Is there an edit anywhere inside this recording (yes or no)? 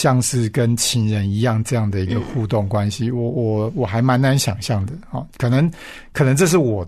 no